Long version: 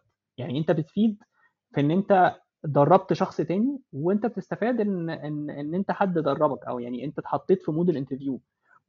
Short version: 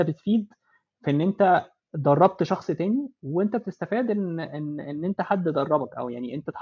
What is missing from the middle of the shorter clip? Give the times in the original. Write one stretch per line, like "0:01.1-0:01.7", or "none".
none

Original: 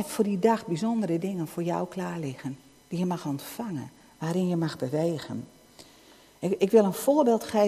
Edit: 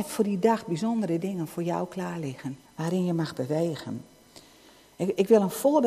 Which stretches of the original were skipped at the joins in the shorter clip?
0:02.6-0:04.1

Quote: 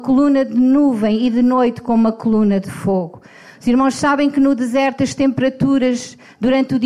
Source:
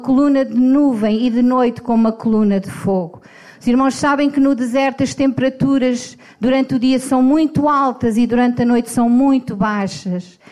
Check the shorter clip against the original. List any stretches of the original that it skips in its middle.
none

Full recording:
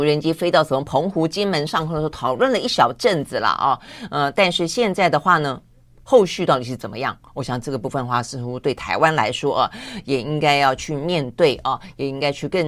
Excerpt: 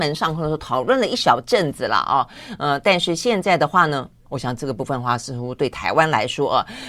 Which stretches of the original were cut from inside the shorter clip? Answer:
0:05.8-0:07.3

